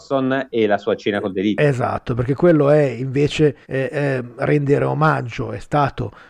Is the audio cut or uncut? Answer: cut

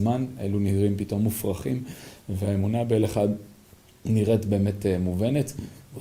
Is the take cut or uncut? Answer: uncut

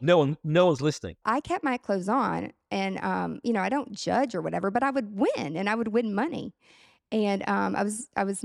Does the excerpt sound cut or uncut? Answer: cut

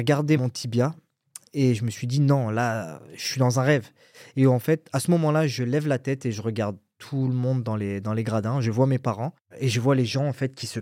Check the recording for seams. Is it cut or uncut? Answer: uncut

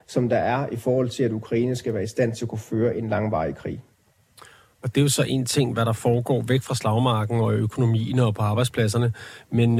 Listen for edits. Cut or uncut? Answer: uncut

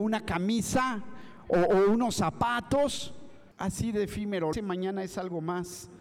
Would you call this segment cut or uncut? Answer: cut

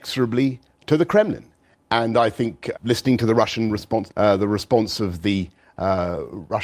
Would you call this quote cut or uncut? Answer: cut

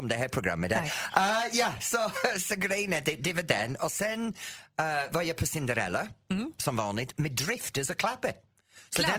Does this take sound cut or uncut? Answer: uncut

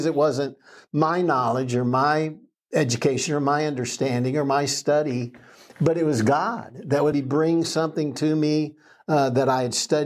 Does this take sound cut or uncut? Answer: cut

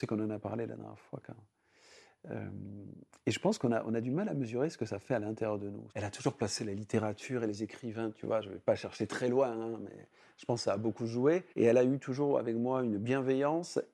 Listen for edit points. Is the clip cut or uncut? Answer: cut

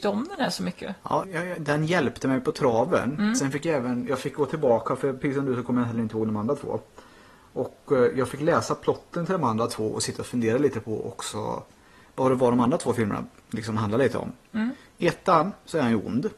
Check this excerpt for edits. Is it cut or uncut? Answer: cut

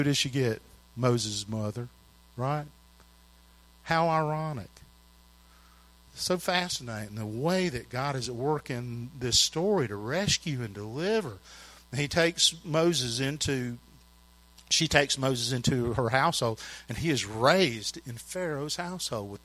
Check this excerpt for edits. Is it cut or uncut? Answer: uncut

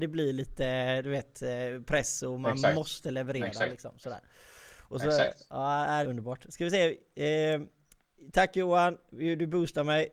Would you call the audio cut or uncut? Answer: cut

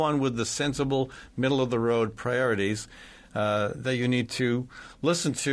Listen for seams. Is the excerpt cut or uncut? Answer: uncut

